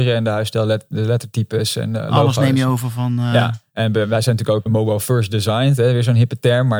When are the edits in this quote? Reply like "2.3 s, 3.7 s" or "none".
4.7 s